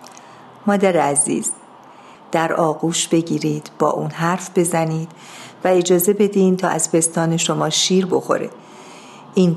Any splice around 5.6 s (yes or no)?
no